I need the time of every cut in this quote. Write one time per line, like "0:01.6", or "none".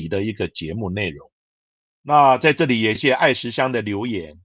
0:01.8
0:03.0